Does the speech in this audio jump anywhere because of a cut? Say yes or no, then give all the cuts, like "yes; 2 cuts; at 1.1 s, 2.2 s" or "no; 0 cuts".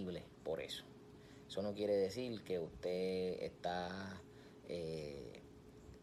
no; 0 cuts